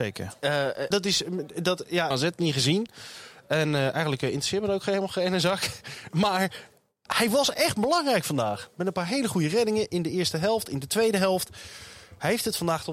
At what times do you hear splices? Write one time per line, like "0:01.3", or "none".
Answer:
0:00.9
0:02.1